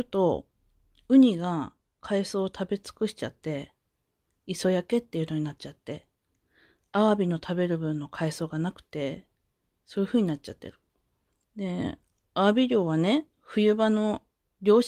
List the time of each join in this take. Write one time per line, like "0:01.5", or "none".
0:11.4

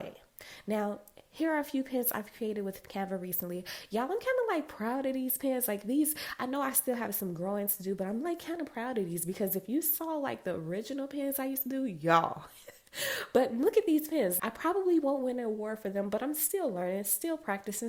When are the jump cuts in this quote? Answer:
0:14.4

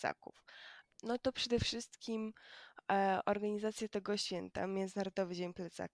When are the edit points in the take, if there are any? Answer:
0:00.9

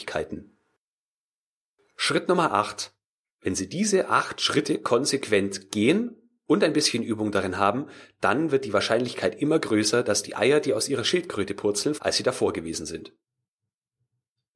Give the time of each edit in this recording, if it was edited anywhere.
0:03.2
0:12.0

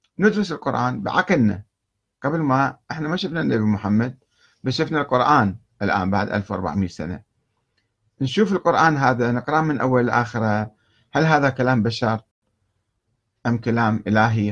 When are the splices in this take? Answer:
none

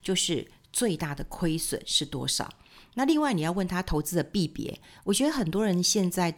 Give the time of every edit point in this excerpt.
none

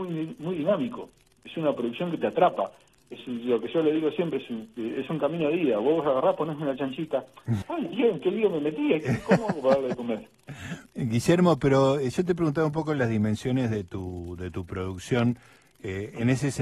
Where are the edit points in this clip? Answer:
0:07.6
0:10.9

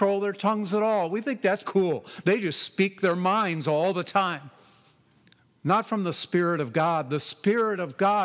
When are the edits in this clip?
0:01.6
0:05.5

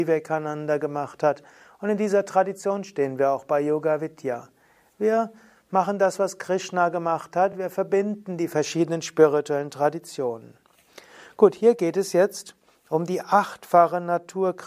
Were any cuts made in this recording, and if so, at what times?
none

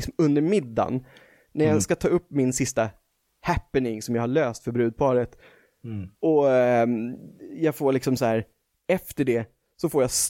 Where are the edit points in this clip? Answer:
0:06.2

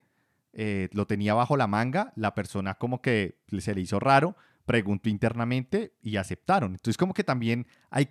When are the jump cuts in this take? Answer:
none

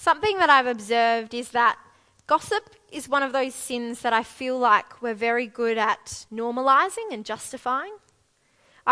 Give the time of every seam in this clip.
none

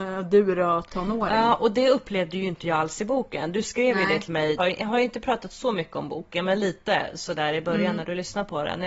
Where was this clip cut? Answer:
0:04.6

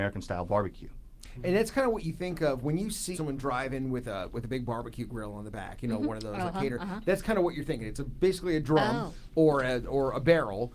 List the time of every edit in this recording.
0:03.1

